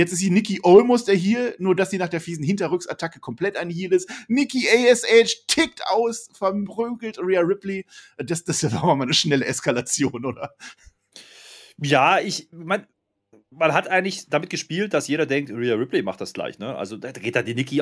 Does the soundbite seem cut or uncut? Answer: uncut